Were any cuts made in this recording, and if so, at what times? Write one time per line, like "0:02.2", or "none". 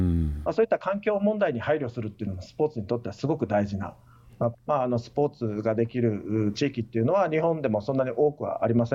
0:04.5

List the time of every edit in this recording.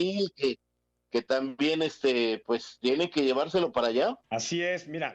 0:04.2

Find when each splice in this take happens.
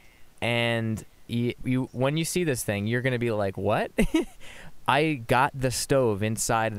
0:01.6

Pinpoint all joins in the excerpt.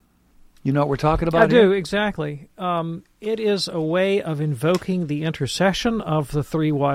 none

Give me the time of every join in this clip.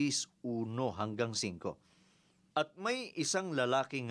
0:02.5

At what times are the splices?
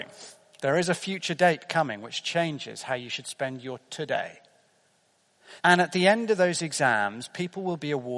0:05.6

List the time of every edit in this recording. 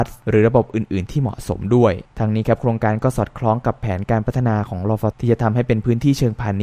0:05.1

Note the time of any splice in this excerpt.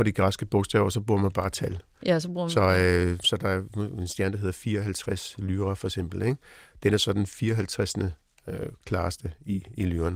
none

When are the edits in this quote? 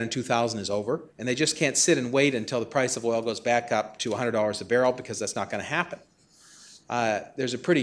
0:01.1

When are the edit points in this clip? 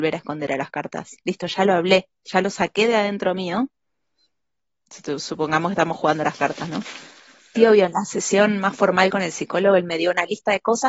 0:04.7
0:07.6

